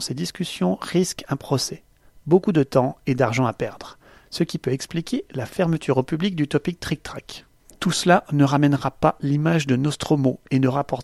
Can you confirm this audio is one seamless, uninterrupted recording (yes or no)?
yes